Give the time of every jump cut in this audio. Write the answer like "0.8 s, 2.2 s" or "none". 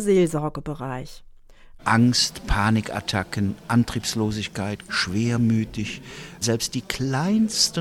1.8 s, 4.9 s, 6.4 s